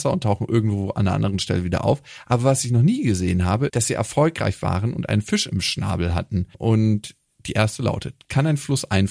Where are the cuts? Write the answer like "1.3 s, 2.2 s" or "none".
3.7 s, 6.5 s